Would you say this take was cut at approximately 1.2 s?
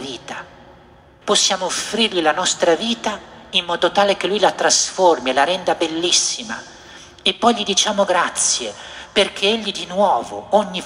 yes; 1 cut; at 1.2 s

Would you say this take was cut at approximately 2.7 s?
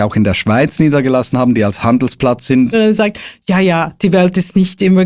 yes; 1 cut; at 2.7 s

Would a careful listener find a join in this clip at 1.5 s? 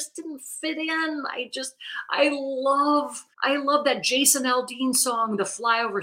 no; 1 cut; at 3.3 s

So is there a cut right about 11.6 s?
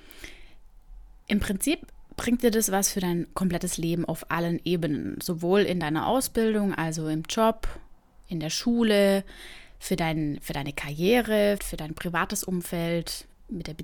yes; 1 cut; at 11.6 s

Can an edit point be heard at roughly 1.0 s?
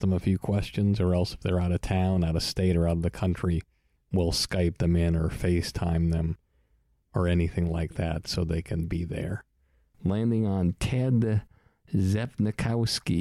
no; 1 cut; at 9.9 s

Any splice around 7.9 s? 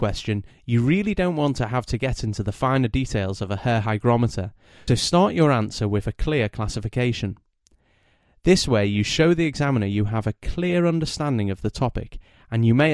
no; 1 cut; at 4.9 s

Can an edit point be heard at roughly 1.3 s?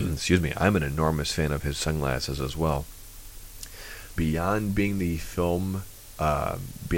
no; 1 cut; at 4.2 s

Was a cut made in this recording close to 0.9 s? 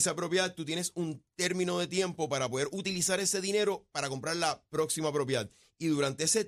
no; 0 cuts

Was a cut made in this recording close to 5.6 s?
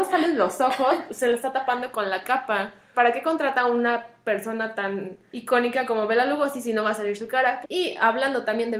no; 2 cuts; at 2.9 s, 7.6 s

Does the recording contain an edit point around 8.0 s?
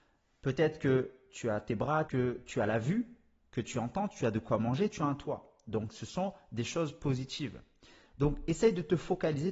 no; 1 cut; at 2.1 s

